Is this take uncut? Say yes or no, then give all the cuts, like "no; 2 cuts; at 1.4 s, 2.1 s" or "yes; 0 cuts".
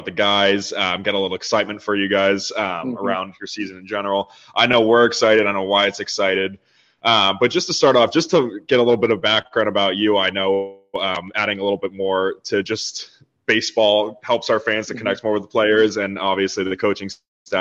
yes; 0 cuts